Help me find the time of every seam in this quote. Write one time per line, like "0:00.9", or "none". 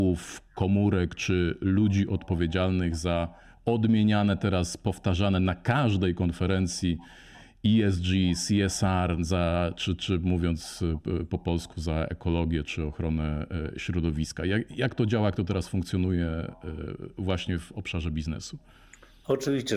none

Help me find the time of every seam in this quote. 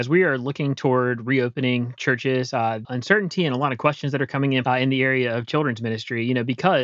0:02.8
0:04.6

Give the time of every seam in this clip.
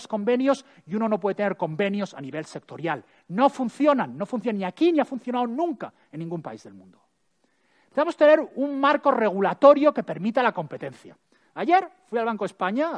none

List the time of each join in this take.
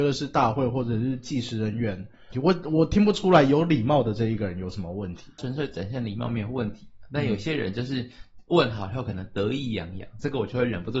0:02.3

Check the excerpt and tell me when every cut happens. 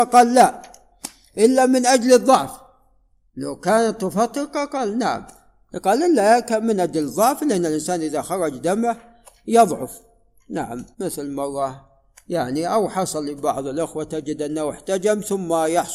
0:10.9

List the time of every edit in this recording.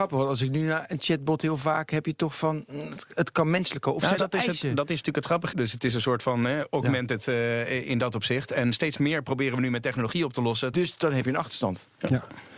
0:04.2
0:05.5
0:10.7

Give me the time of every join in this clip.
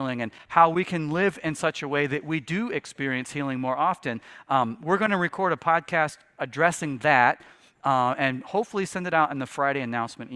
none

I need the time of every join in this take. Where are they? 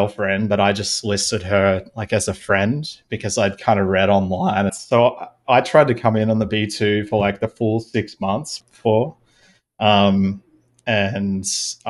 0:04.7
0:08.6

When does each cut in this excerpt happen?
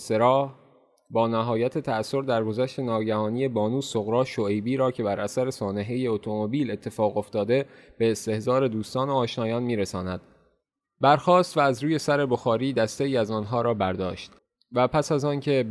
0:10.8

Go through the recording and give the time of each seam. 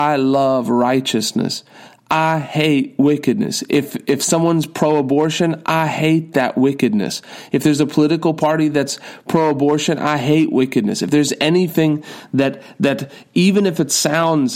none

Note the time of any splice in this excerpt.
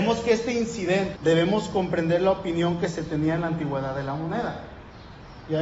0:01.2

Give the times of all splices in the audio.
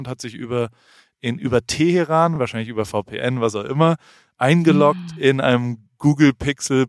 none

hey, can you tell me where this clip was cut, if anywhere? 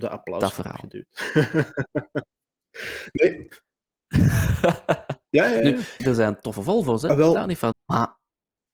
0:06.0
0:07.7

